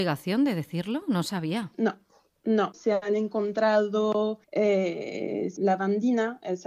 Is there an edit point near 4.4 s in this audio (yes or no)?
yes